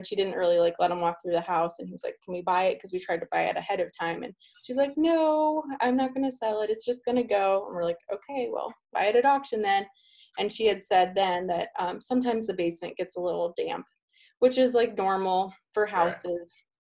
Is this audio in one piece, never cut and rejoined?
no; 1 cut; at 8.9 s

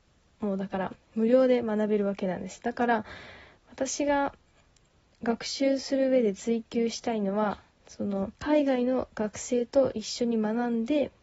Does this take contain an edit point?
yes; 1 cut; at 8.4 s

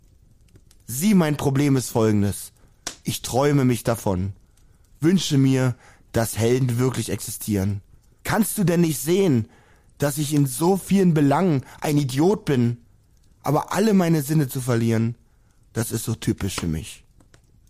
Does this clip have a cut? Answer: yes; 1 cut; at 8.2 s

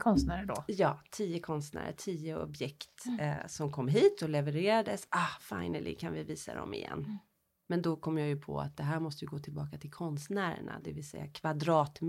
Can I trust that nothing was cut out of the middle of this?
yes; 0 cuts

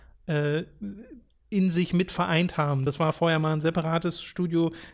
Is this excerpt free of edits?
yes; 0 cuts

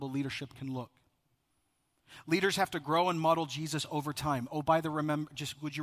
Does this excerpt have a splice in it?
no; 0 cuts

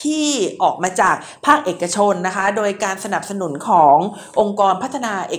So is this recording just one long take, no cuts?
yes; 0 cuts

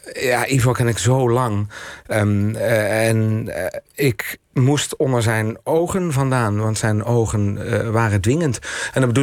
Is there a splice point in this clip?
yes; 1 cut; at 2.1 s

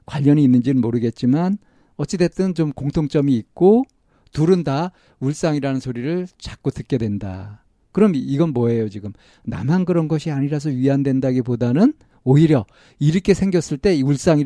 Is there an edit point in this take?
no; 0 cuts

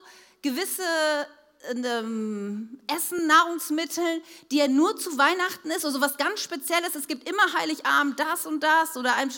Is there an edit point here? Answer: no; 0 cuts

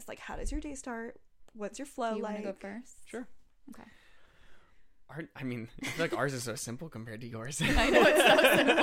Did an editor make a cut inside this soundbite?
no; 0 cuts

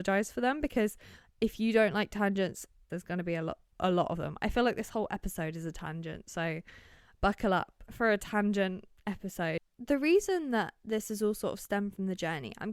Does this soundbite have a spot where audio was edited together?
yes; 2 cuts; at 2.9 s, 7.9 s

